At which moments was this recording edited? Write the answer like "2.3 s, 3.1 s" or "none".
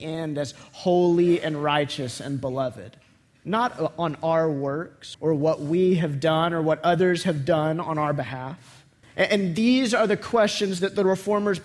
5.1 s, 9.0 s

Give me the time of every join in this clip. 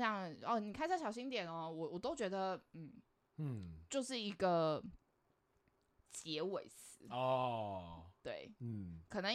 none

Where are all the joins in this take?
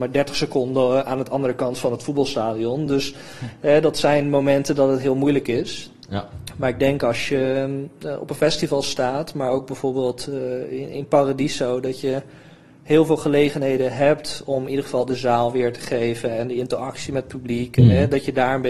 none

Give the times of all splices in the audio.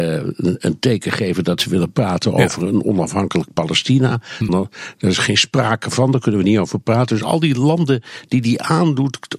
4.5 s

